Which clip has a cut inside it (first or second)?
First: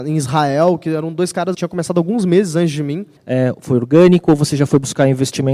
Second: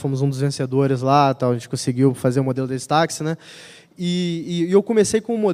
first